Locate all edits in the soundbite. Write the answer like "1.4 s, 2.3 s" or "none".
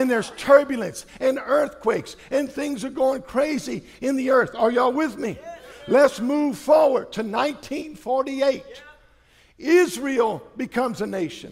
none

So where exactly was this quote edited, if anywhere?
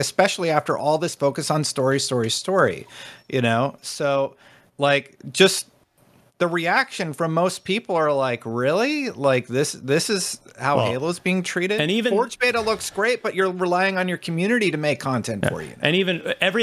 none

